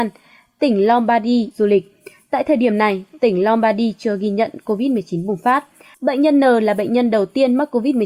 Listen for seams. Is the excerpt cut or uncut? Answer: cut